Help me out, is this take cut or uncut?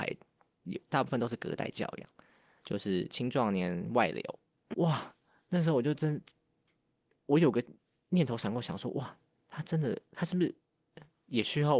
cut